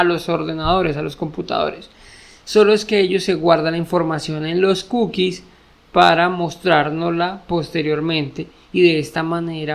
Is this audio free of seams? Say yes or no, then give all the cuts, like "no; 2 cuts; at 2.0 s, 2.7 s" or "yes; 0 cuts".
yes; 0 cuts